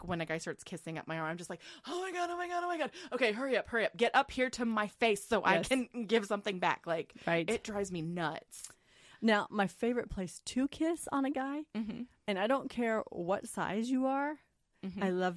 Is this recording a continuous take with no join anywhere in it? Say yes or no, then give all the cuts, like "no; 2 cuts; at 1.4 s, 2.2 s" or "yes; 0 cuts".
yes; 0 cuts